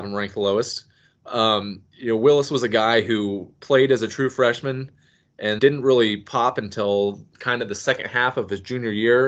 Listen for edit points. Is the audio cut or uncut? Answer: cut